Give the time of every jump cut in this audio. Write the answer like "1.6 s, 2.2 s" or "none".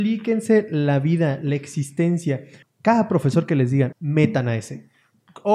2.6 s, 3.9 s